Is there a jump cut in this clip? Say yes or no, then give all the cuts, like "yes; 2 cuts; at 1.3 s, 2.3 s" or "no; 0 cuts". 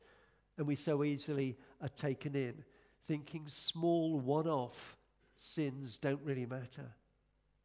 no; 0 cuts